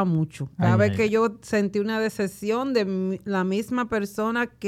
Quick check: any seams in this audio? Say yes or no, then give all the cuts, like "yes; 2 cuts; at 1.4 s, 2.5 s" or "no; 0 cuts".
no; 0 cuts